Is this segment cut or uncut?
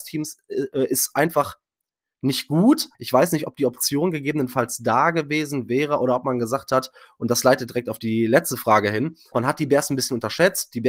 cut